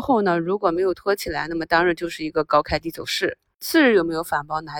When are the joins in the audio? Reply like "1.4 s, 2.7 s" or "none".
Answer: none